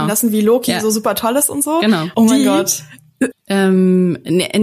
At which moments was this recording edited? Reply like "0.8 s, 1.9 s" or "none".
2.1 s, 3.3 s